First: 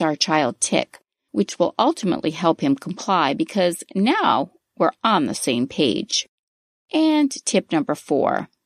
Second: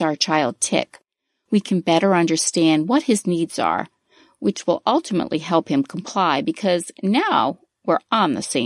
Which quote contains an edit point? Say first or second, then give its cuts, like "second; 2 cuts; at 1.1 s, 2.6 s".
first; 1 cut; at 1.3 s